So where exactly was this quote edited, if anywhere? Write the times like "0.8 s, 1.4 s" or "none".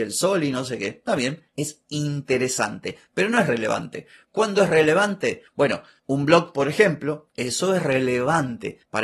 7.3 s